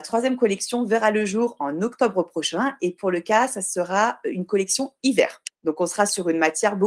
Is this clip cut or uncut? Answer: cut